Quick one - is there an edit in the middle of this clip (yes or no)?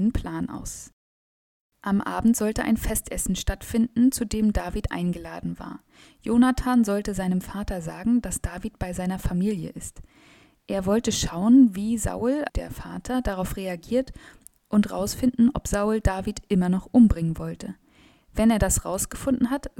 yes